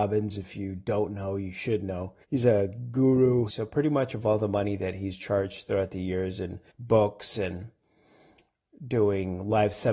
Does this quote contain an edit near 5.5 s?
no; 3 cuts; at 2.2 s, 3.5 s, 6.7 s

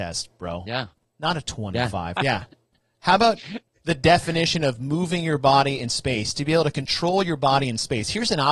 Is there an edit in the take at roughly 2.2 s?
yes; 1 cut; at 2.2 s

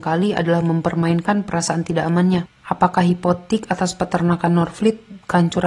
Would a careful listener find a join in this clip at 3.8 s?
no; 1 cut; at 2.5 s

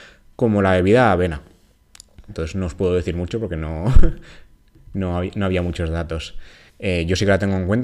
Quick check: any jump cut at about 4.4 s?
no; 2 cuts; at 2.3 s, 6.7 s

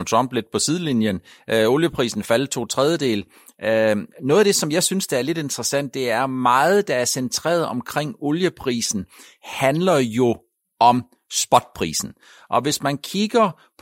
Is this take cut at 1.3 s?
no; 0 cuts

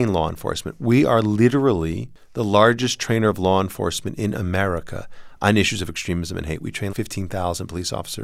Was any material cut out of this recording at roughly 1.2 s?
no; 1 cut; at 6.9 s

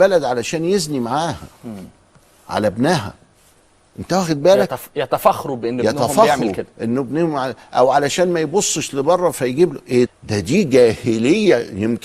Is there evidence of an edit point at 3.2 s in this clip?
no; 1 cut; at 10.1 s

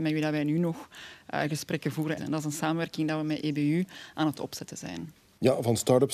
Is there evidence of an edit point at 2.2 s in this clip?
yes; 1 cut; at 2.2 s

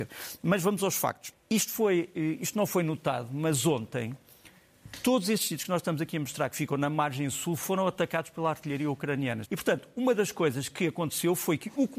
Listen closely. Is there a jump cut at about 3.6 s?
no; 2 cuts; at 1.3 s, 9.4 s

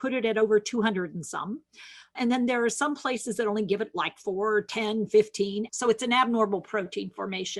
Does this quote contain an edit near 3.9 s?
no; 2 cuts; at 2.1 s, 5.7 s

